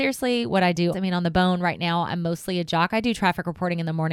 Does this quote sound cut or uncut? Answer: cut